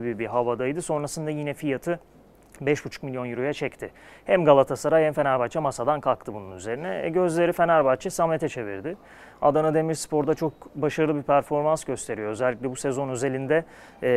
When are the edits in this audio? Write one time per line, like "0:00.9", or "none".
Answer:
none